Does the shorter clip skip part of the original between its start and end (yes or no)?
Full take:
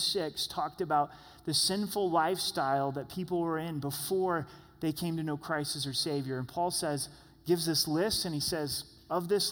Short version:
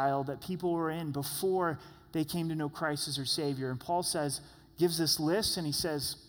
no